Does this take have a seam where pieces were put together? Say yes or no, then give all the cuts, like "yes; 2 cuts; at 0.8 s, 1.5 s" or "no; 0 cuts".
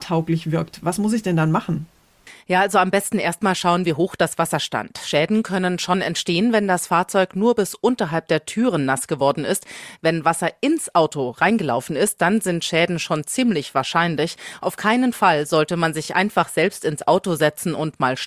no; 0 cuts